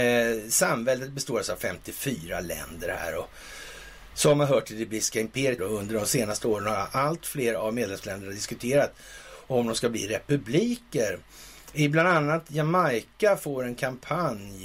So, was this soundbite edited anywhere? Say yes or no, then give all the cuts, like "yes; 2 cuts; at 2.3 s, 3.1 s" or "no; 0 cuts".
yes; 1 cut; at 5.6 s